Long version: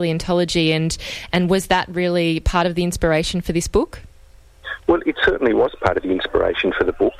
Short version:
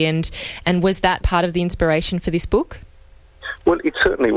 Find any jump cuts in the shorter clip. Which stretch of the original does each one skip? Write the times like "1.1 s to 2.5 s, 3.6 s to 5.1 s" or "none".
1.9 s to 2.4 s